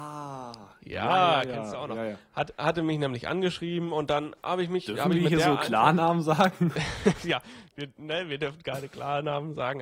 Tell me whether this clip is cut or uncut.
cut